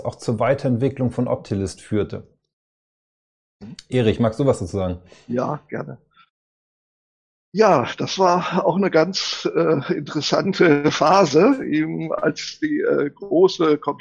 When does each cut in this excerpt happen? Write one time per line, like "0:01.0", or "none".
none